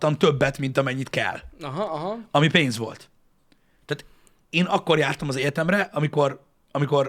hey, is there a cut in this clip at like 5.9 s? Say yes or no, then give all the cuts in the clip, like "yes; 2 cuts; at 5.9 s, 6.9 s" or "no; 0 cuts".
no; 0 cuts